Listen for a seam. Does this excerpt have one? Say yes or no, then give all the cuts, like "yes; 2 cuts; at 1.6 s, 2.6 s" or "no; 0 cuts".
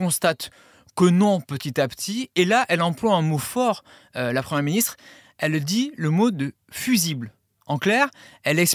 no; 0 cuts